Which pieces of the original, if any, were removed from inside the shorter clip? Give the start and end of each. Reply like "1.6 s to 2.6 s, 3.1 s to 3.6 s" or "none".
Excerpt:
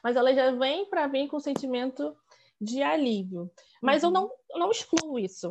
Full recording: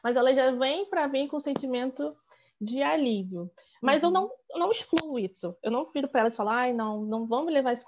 none